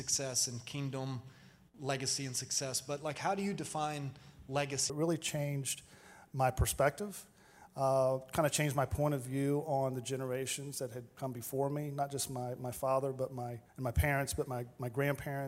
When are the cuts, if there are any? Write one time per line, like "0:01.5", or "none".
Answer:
0:04.9
0:13.7